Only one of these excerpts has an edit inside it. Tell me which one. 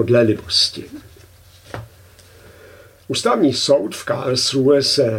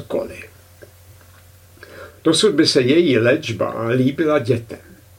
second; 1 cut; at 2.1 s

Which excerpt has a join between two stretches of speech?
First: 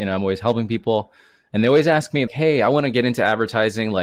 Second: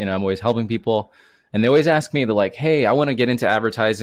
first; 1 cut; at 2.3 s

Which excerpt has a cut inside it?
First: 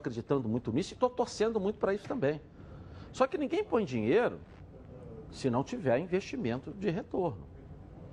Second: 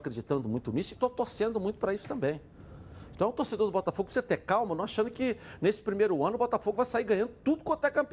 second; 1 cut; at 3.1 s

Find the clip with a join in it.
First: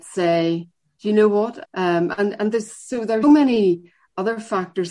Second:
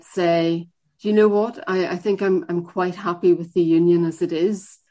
first; 2 cuts; at 1.6 s, 3.2 s

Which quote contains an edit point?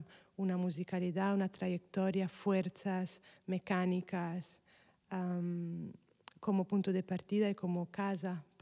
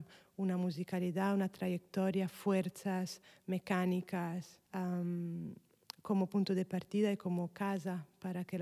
second; 1 cut; at 4.7 s

